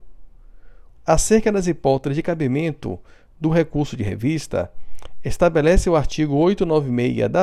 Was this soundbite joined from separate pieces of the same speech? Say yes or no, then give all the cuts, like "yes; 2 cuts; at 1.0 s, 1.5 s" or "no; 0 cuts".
yes; 1 cut; at 0.9 s